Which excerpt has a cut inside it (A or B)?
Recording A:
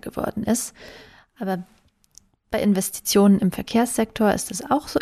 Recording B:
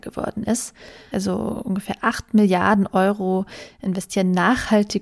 B